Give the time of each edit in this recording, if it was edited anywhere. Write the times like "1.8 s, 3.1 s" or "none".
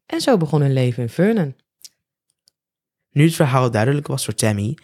none